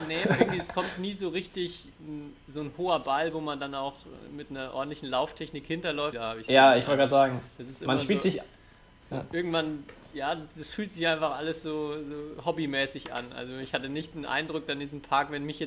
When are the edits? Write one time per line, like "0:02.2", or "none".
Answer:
0:06.1